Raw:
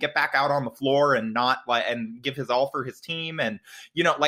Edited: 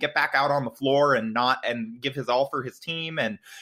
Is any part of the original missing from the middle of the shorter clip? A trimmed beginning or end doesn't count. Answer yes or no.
yes